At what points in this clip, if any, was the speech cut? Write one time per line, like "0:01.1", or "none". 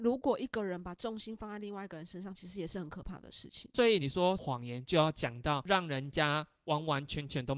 none